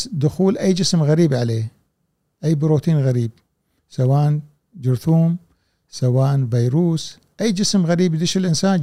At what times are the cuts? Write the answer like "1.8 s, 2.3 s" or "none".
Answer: none